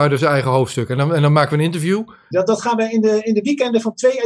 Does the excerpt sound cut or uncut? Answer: cut